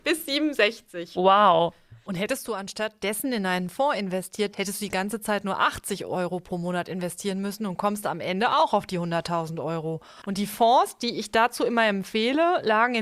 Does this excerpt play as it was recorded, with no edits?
no; 2 cuts; at 4.5 s, 10.2 s

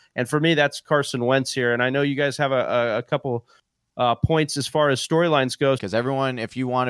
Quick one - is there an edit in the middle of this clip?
yes; 1 cut; at 5.8 s

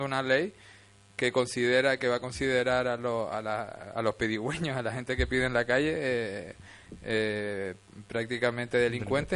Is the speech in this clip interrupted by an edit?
no; 0 cuts

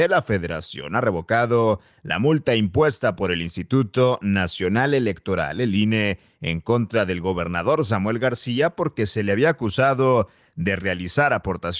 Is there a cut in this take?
no; 0 cuts

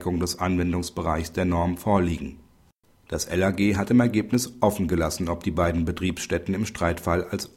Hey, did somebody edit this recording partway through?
yes; 1 cut; at 2.9 s

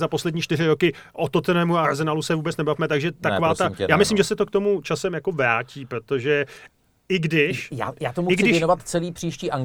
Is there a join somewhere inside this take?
no; 0 cuts

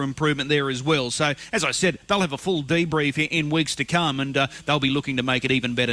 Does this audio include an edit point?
no; 0 cuts

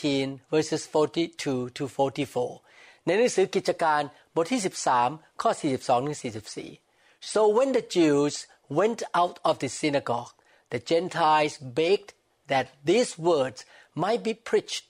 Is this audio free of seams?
yes; 0 cuts

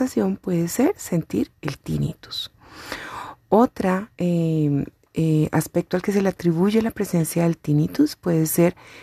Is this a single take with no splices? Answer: no; 1 cut; at 4.1 s

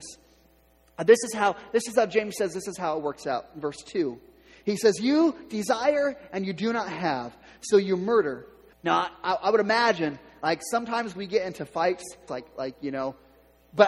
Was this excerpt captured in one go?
no; 2 cuts; at 8.7 s, 12.3 s

